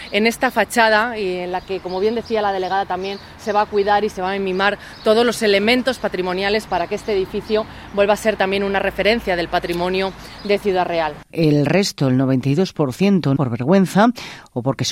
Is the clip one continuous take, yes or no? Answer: no